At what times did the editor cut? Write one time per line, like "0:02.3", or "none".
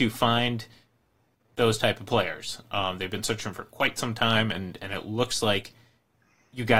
none